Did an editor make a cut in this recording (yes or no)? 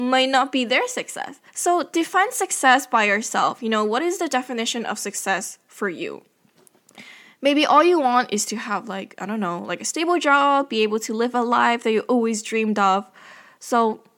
yes